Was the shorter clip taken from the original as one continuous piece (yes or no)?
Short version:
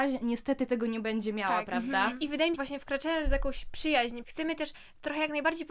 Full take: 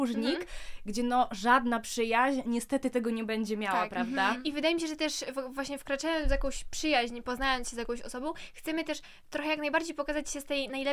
no